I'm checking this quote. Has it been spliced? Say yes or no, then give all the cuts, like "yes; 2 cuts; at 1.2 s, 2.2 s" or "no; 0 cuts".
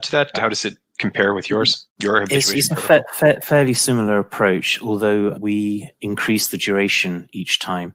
no; 0 cuts